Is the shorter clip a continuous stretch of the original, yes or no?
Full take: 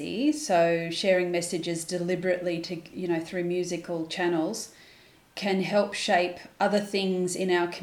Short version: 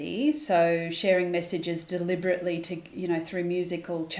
yes